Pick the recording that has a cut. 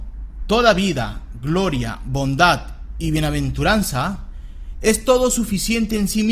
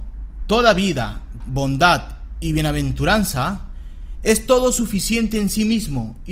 second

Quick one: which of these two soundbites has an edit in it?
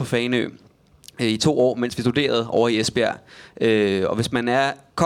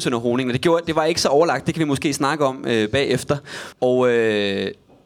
second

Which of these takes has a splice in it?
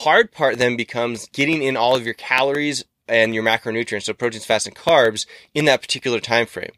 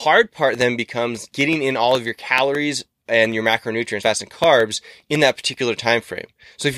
second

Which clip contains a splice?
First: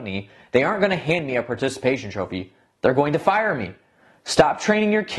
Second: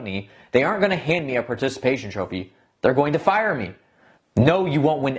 second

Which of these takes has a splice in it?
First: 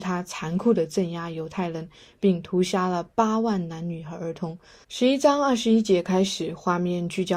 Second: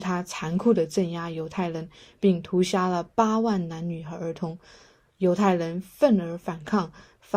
first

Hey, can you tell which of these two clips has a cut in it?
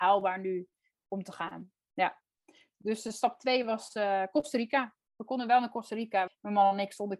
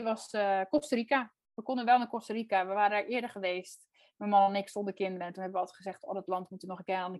first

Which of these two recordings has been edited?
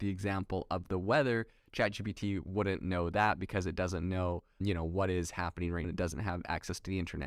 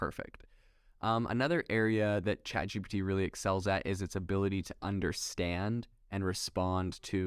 first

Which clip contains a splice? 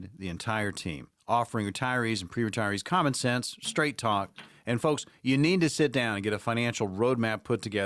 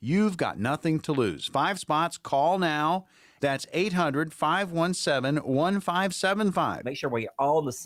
second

